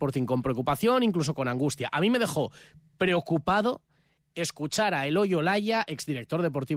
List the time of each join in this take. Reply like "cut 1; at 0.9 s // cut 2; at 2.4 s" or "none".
none

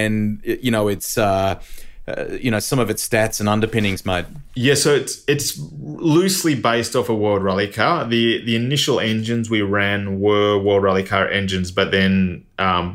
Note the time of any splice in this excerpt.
none

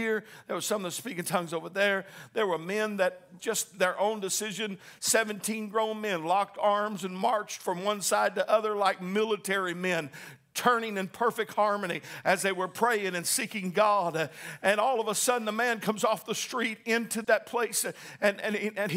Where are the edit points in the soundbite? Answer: cut 1; at 3.4 s // cut 2; at 17.2 s

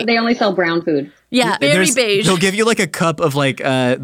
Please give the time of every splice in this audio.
cut 1; at 1.6 s

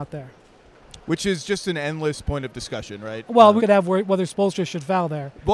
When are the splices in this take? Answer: cut 1; at 3.6 s

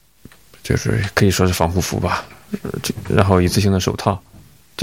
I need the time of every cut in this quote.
none

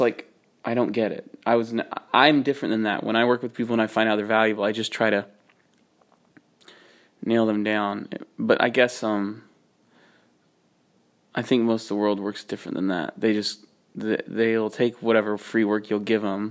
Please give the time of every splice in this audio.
none

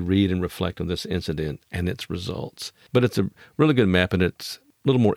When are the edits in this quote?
cut 1; at 2.9 s

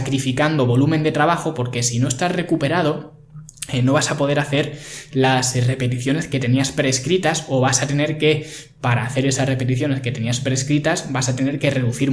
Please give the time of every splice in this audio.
none

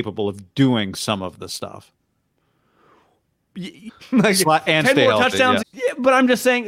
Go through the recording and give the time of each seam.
cut 1; at 3.9 s // cut 2; at 5.6 s

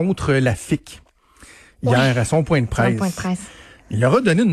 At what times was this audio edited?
none

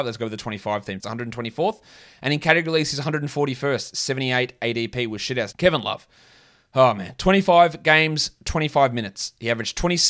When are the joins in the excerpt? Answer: cut 1; at 1.0 s // cut 2; at 5.5 s

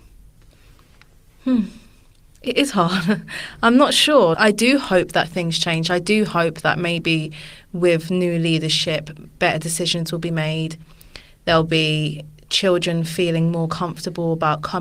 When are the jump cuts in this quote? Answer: cut 1; at 4.3 s

